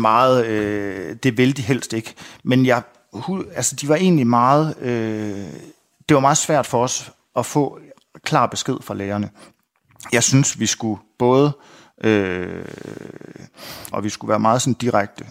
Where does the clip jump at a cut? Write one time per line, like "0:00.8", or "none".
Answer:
0:13.9